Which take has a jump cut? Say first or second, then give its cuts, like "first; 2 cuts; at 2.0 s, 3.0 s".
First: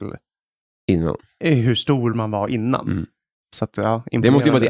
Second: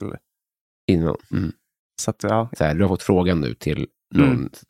second; 2 cuts; at 1.3 s, 2.5 s